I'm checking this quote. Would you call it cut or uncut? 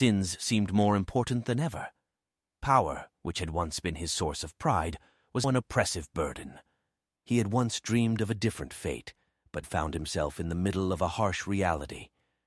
cut